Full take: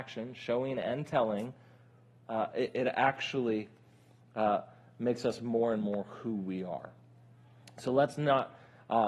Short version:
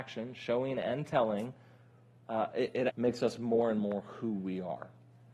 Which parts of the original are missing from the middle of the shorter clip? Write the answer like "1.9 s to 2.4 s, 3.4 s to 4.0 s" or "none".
2.9 s to 4.9 s